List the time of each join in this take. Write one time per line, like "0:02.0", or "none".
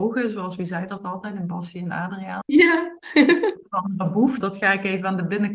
0:02.4
0:04.4